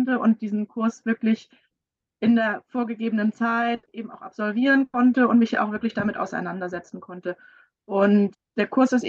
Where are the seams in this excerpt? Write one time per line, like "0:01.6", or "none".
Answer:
none